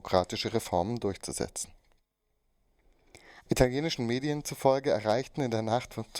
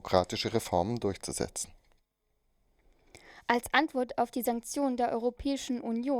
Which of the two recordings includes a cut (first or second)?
first